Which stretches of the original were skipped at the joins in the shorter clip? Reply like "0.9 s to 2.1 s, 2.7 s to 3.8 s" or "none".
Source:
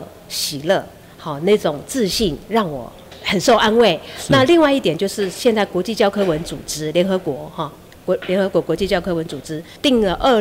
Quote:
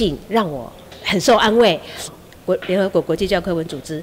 4.3 s to 7.7 s